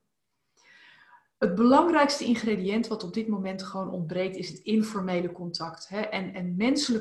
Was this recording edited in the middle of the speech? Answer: no; 0 cuts

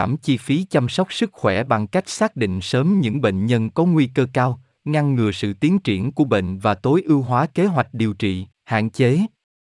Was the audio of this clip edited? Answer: yes; 1 cut; at 8.5 s

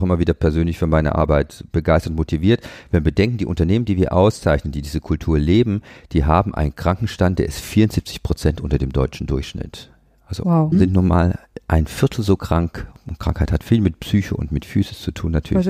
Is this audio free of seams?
no; 1 cut; at 10.7 s

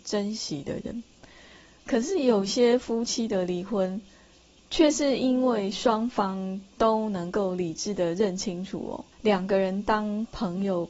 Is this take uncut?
no; 2 cuts; at 1.8 s, 9.1 s

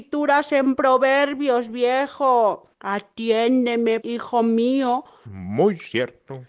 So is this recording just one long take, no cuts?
no; 3 cuts; at 2.7 s, 4.0 s, 5.3 s

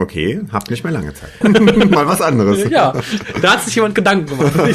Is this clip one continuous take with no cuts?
no; 1 cut; at 1.4 s

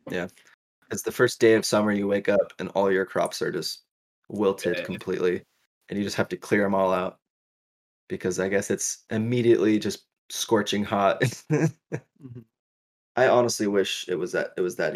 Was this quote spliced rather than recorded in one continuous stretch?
no; 0 cuts

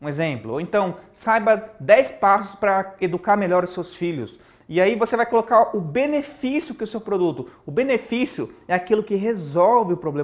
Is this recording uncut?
yes; 0 cuts

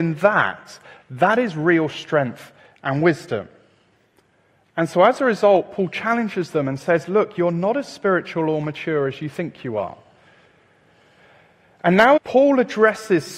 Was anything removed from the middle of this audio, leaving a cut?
yes; 1 cut; at 12.2 s

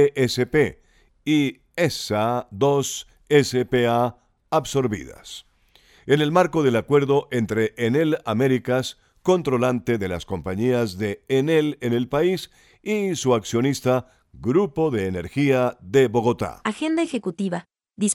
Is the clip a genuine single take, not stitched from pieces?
yes; 0 cuts

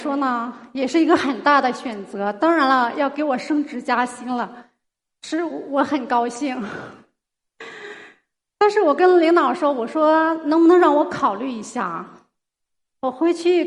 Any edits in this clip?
no; 0 cuts

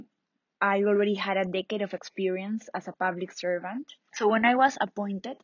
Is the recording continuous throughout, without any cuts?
no; 1 cut; at 4.1 s

